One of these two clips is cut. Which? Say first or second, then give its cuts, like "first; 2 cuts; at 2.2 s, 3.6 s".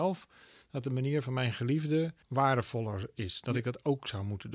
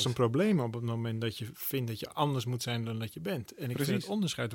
first; 1 cut; at 2.2 s